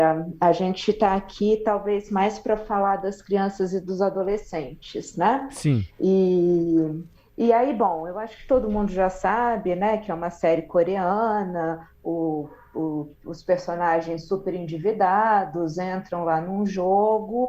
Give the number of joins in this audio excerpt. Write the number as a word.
zero